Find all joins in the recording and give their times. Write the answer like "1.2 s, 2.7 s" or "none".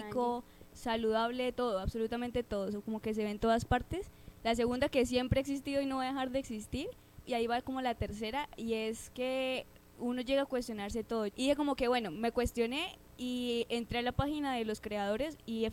7.3 s, 11.3 s

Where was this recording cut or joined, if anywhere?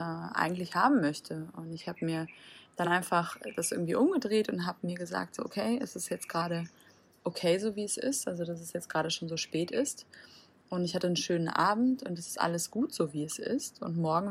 none

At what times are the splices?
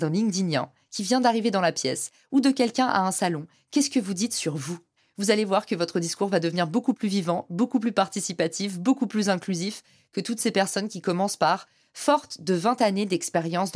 none

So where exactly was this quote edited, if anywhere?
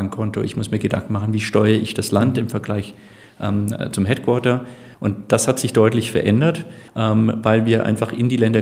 4.9 s, 6.9 s

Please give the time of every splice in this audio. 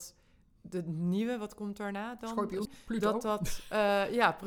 2.7 s

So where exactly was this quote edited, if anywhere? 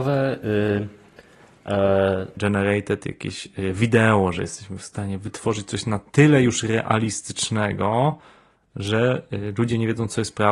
2.4 s

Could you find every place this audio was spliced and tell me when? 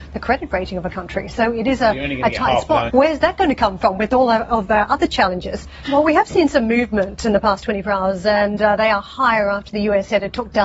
2.9 s, 5.8 s

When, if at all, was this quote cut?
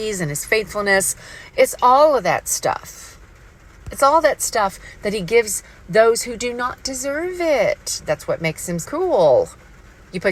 8.8 s

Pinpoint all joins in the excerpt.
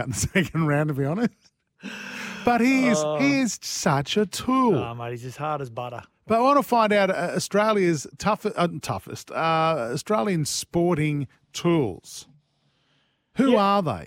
none

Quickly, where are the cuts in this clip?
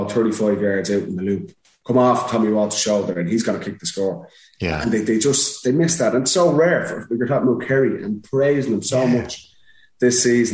none

